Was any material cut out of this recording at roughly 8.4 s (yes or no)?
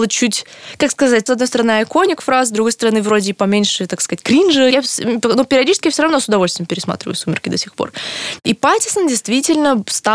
yes